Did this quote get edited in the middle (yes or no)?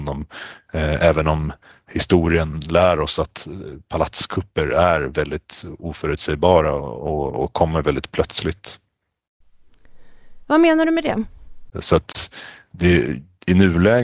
yes